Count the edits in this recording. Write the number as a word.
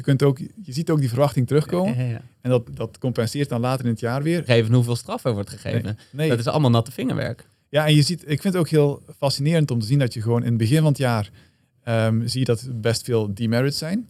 two